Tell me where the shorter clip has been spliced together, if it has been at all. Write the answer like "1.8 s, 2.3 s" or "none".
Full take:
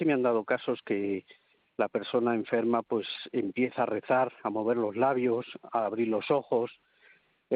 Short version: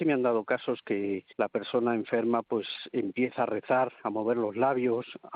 1.3 s